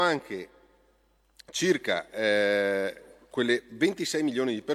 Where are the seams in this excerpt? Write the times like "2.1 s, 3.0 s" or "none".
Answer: none